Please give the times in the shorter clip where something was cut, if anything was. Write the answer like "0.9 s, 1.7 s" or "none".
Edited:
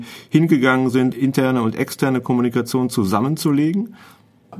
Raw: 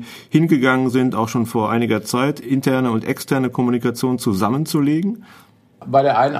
1.1 s